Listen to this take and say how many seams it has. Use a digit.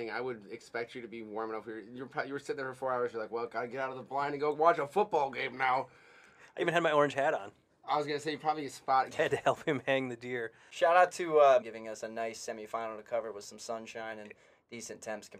2